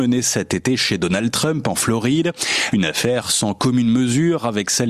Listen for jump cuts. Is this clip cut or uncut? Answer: cut